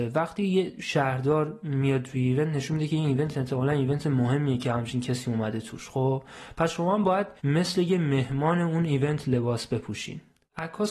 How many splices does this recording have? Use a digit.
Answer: 1